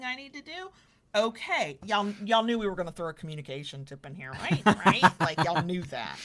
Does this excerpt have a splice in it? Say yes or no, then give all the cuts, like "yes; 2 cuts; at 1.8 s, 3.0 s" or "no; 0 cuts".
yes; 1 cut; at 1.8 s